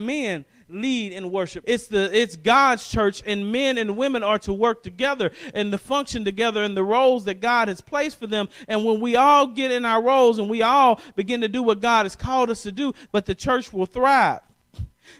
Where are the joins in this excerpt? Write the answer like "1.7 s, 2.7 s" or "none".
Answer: 1.6 s, 13.1 s